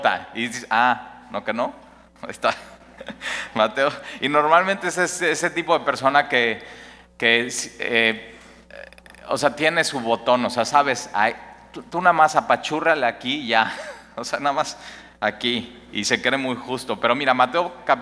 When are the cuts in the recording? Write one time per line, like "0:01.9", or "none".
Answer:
none